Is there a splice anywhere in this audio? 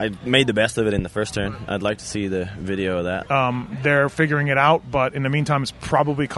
yes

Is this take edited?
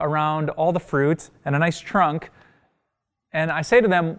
no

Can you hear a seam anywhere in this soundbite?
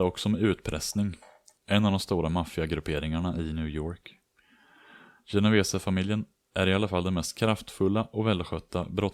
yes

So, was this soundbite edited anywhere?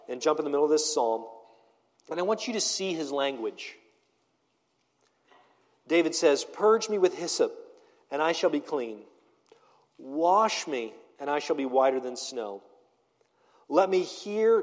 no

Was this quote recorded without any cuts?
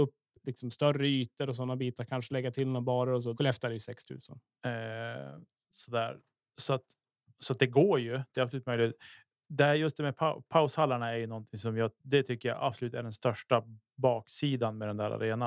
no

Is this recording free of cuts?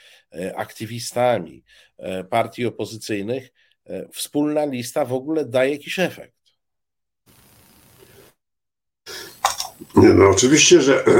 yes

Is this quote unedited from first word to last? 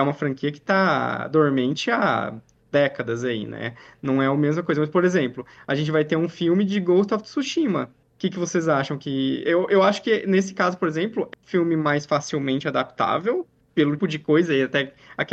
no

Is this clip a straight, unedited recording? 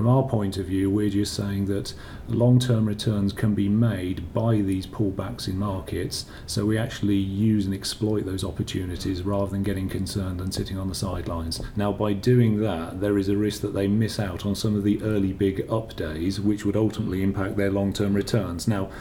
no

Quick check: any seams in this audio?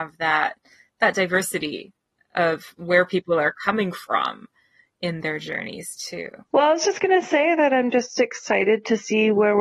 yes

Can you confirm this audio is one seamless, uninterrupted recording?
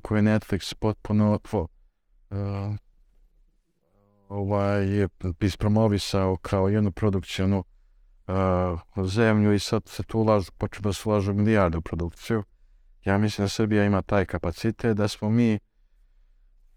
yes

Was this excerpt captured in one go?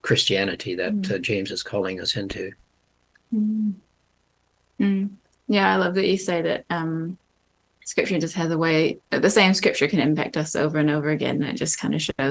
yes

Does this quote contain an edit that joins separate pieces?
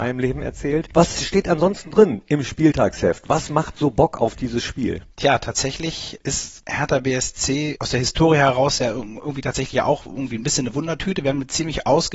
no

